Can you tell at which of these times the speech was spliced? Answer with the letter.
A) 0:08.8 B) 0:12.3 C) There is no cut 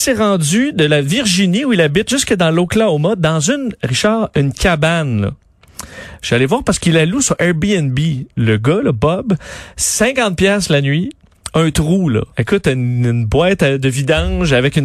B